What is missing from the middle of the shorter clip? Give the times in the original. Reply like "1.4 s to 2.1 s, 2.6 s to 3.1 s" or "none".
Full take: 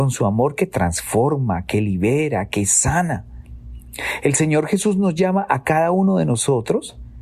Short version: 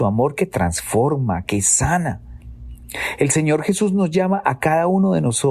1.6 s to 2.5 s